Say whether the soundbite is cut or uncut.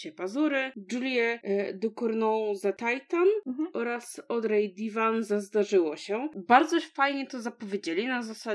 uncut